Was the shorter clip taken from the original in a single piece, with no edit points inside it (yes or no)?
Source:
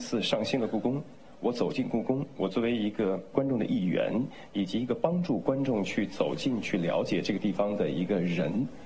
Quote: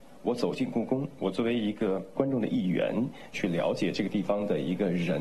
no